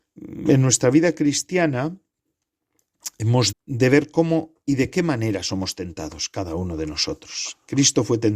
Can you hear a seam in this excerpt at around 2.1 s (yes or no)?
no